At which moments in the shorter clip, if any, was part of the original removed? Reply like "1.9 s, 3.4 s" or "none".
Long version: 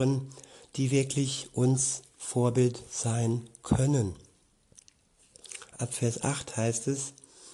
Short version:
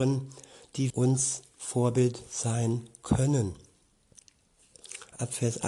0.9 s